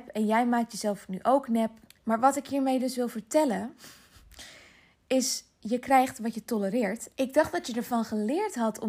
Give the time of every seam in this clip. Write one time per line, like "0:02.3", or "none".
0:01.9
0:07.1